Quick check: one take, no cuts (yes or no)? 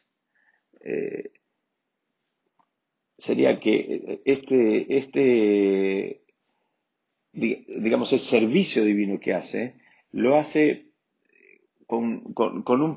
yes